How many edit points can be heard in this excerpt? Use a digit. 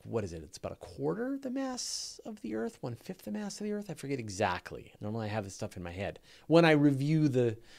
1